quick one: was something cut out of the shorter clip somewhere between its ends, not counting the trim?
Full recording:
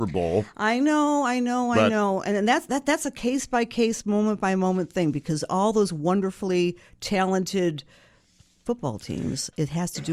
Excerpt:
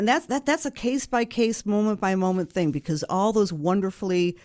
no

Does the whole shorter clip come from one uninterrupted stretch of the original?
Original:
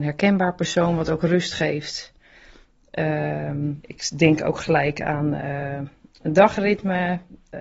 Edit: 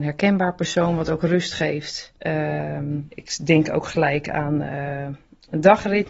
no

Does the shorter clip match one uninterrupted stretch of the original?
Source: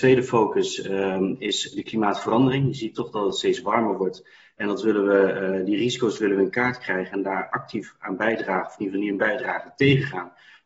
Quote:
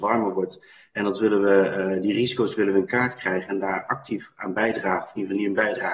yes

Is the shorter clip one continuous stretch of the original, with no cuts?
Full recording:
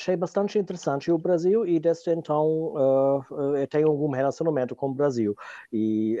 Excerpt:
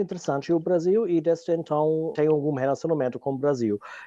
no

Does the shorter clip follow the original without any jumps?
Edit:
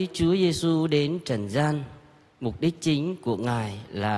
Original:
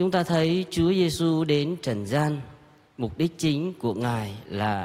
yes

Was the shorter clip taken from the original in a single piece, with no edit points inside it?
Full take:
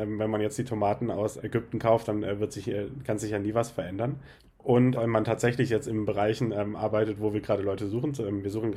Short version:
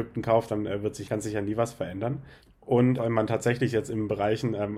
no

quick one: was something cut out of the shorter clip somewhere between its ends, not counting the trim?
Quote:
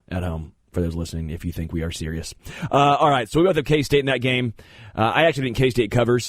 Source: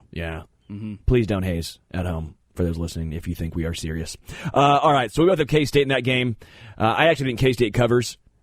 no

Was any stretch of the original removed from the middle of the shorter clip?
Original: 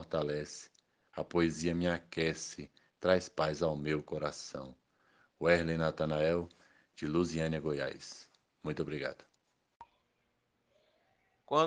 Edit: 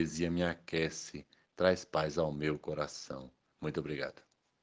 yes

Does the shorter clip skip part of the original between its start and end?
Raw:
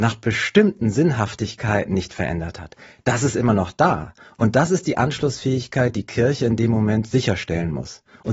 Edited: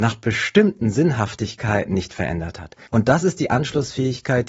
yes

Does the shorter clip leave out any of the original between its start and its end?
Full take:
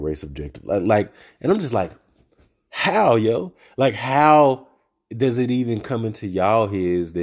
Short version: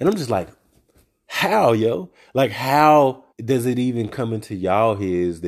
yes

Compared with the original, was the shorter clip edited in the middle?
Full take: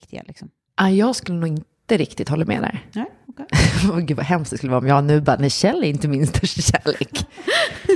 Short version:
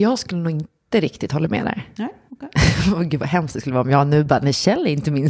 no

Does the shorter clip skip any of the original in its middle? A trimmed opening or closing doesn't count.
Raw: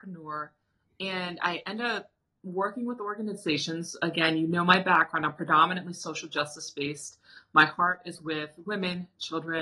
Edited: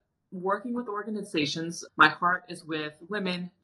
yes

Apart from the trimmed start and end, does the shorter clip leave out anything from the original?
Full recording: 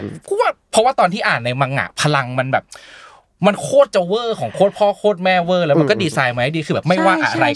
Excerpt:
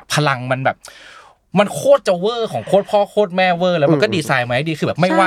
no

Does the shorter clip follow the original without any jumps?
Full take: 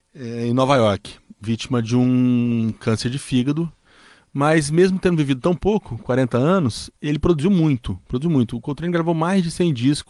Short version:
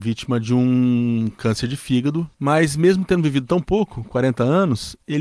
no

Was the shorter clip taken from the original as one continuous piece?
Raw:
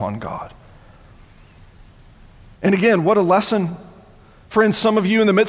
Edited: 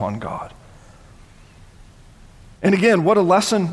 yes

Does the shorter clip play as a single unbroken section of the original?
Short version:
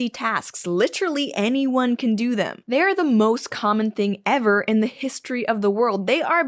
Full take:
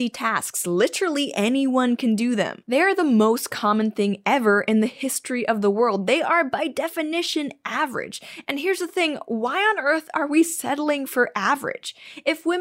yes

